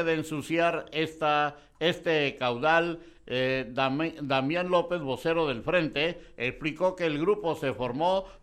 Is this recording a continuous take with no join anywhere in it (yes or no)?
yes